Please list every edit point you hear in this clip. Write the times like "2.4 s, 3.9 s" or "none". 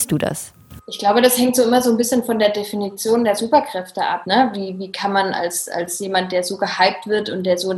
4.2 s